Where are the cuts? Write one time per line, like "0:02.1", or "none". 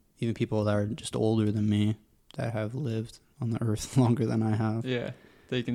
none